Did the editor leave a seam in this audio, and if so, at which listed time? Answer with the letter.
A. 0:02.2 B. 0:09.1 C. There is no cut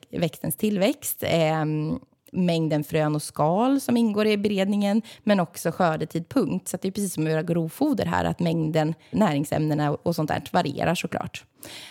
B